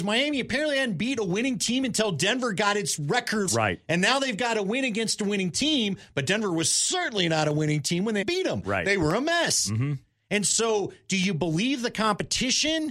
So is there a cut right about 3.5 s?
yes; 2 cuts; at 3.5 s, 8.2 s

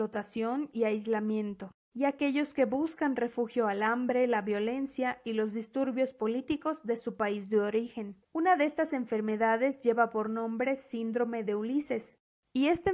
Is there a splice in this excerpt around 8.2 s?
yes; 1 cut; at 8.2 s

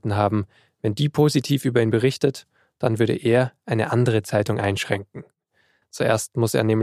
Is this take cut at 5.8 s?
yes; 1 cut; at 5.8 s

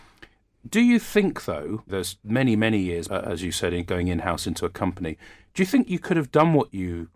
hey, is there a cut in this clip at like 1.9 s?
yes; 2 cuts; at 1.9 s, 3.1 s

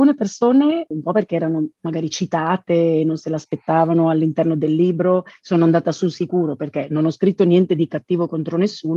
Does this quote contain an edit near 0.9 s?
yes; 1 cut; at 0.9 s

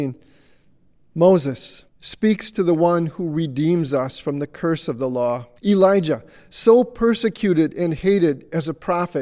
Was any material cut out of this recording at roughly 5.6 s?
yes; 2 cuts; at 1.9 s, 5.6 s

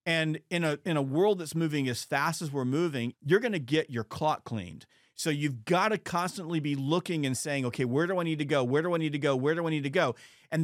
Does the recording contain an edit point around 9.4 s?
no; 1 cut; at 3.1 s

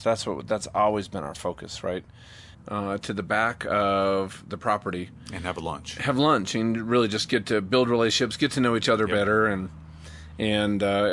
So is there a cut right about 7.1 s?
no; 1 cut; at 2.5 s

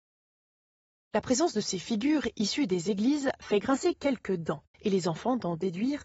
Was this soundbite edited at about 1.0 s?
no; 1 cut; at 4.7 s

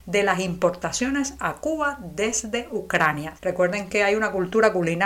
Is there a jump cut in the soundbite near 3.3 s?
yes; 1 cut; at 3.3 s

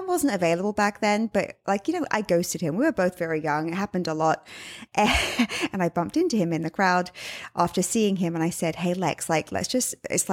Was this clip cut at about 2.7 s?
no; 1 cut; at 4.9 s

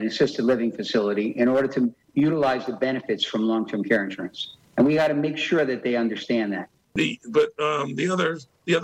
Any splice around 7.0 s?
yes; 1 cut; at 7.0 s

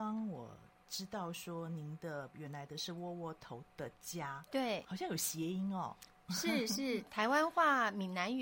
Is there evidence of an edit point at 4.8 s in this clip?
yes; 1 cut; at 4.8 s

